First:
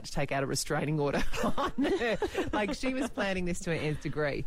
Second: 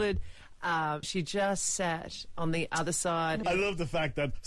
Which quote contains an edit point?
second; 2 cuts; at 1.0 s, 3.4 s

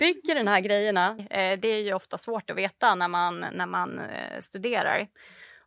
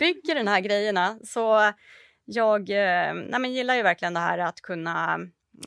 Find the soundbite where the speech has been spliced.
first; 1 cut; at 1.2 s

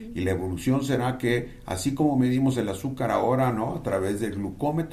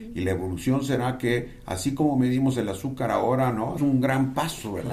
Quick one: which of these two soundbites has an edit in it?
second; 1 cut; at 3.8 s

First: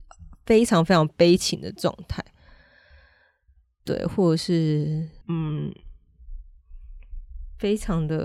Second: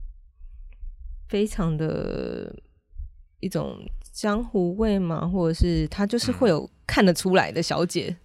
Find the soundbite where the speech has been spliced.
first; 1 cut; at 5.2 s

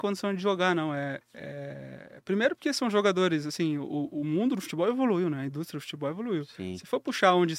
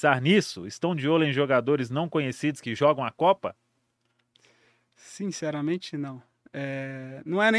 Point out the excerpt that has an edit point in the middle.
first; 1 cut; at 1.2 s

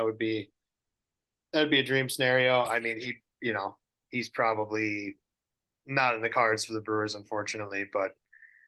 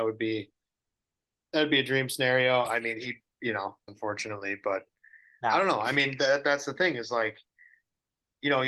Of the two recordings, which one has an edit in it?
second; 1 cut; at 3.9 s

